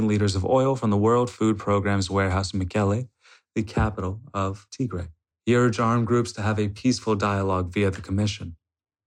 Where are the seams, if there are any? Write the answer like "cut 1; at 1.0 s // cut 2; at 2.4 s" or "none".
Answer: cut 1; at 5.3 s